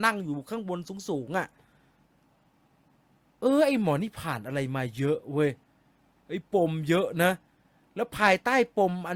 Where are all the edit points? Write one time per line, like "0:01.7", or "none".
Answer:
none